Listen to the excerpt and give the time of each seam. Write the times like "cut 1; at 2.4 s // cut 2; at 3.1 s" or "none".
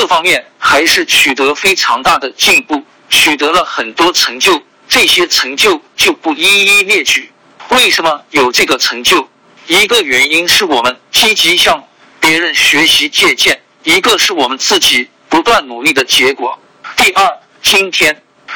none